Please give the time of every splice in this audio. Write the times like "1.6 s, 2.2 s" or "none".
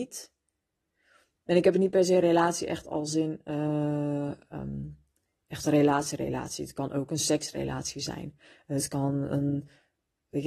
none